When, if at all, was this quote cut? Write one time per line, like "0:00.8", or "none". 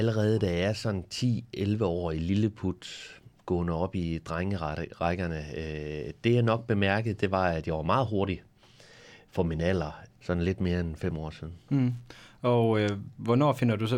0:10.1